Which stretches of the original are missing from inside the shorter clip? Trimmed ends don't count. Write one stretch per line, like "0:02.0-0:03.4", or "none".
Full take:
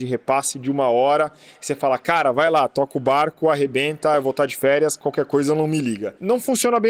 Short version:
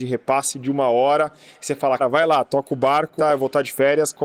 0:02.0-0:02.2
0:03.4-0:04.0